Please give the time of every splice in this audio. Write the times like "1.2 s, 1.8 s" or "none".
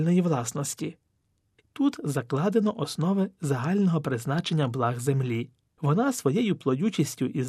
1.6 s